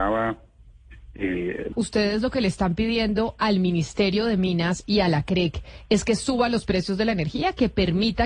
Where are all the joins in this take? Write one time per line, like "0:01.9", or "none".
0:01.7